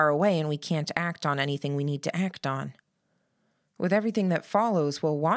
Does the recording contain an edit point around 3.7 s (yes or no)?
no